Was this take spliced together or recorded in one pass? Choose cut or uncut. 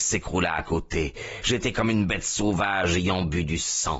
uncut